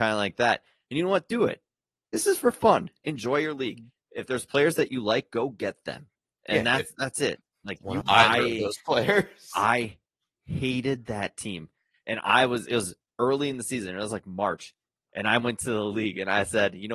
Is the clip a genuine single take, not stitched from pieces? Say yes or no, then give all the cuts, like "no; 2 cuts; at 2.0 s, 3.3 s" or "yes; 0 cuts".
no; 1 cut; at 8.0 s